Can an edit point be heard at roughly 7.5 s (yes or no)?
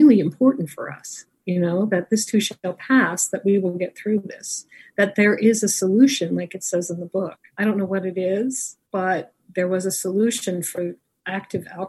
yes